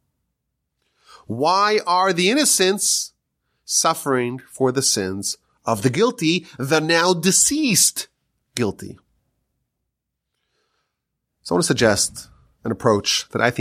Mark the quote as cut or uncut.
uncut